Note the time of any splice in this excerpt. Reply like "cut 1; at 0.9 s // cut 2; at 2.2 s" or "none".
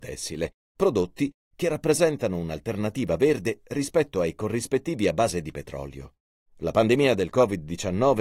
cut 1; at 6.5 s